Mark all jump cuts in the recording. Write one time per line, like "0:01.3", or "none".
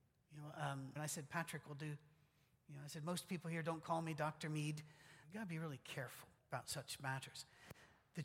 0:01.0
0:05.2
0:06.4